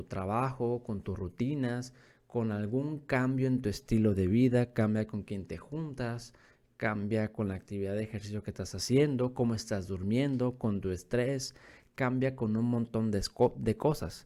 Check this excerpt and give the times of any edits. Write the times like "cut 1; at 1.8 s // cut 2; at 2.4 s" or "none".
none